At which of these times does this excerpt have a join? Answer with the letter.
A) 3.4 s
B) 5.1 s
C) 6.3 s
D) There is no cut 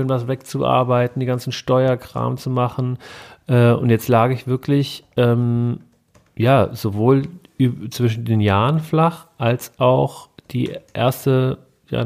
D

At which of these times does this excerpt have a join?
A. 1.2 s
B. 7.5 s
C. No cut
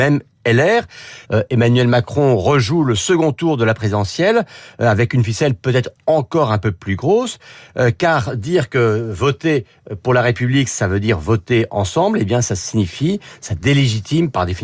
A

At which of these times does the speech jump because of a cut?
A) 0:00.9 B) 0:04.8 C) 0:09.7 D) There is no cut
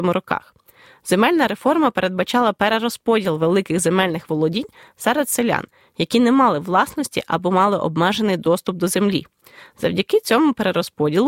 D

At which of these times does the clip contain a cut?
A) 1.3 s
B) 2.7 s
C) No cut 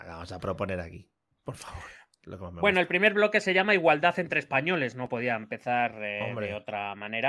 A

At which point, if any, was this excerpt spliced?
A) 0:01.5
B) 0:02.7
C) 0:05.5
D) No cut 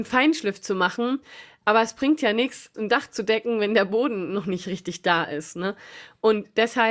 B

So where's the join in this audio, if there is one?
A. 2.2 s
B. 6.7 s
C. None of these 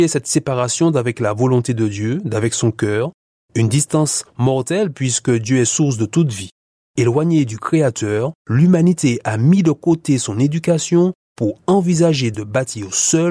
C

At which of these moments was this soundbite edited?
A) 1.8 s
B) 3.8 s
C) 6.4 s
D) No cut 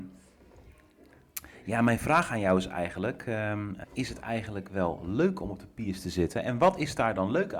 B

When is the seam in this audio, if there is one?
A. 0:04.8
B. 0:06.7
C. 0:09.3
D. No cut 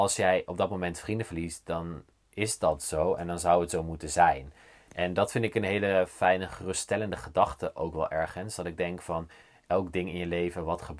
D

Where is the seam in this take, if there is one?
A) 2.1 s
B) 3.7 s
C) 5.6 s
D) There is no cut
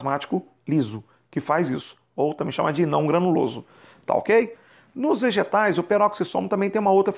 D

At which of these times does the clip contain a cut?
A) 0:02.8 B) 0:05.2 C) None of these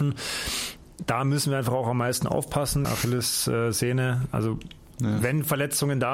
A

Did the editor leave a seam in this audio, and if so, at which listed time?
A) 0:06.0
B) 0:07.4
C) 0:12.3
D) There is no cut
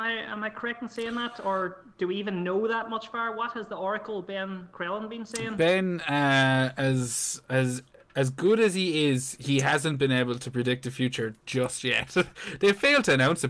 D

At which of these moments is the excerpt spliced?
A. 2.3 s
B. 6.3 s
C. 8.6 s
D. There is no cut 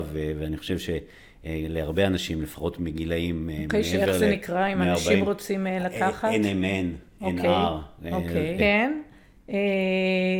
C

